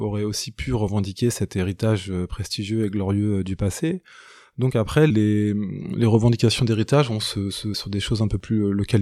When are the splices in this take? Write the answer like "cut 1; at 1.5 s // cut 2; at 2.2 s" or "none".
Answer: cut 1; at 5.1 s // cut 2; at 7.7 s

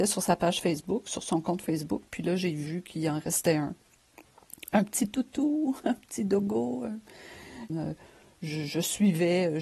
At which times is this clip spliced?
cut 1; at 7.7 s

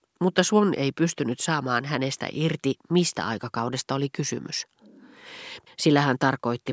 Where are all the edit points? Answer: cut 1; at 5.7 s

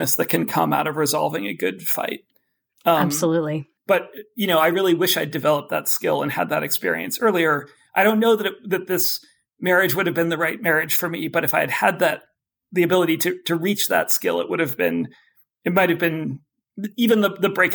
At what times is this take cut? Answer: none

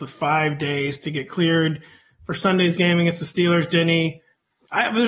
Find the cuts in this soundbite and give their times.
none

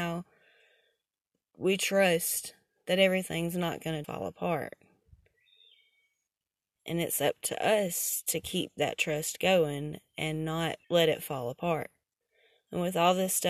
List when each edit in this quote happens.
cut 1; at 4.0 s // cut 2; at 10.8 s

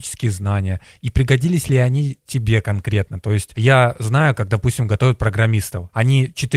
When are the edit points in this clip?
none

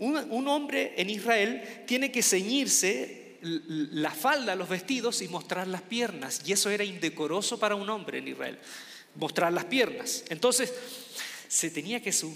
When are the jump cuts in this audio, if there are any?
none

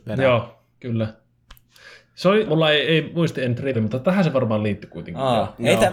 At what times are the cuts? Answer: cut 1; at 2.5 s // cut 2; at 3.7 s

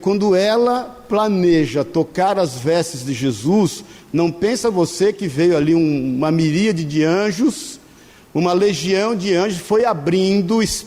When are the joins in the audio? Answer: none

